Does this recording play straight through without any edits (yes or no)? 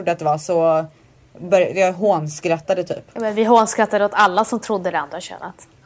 yes